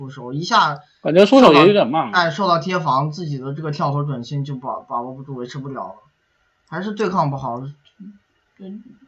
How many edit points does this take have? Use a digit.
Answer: 0